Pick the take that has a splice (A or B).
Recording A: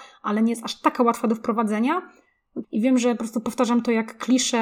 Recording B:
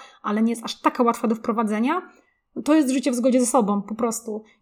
A